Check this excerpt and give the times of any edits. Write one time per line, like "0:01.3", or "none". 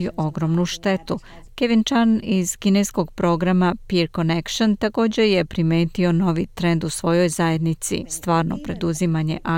0:01.5
0:08.0

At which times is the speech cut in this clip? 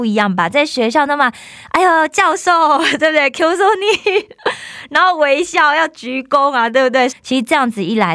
0:07.1

